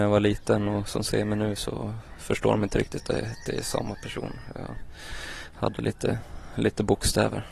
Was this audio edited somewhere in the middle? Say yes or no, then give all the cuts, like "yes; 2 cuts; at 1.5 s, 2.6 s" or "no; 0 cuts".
no; 0 cuts